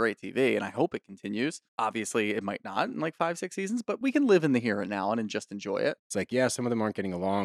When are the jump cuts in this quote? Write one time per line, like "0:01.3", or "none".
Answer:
0:01.7
0:06.0